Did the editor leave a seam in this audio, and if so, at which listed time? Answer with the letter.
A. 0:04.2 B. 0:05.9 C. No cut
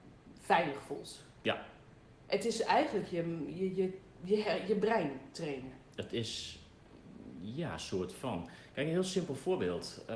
C